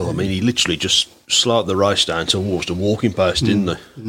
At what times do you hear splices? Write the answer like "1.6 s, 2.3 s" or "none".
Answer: none